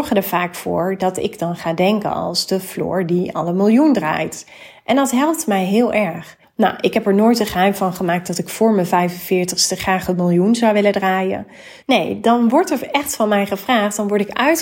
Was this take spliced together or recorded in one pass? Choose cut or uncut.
cut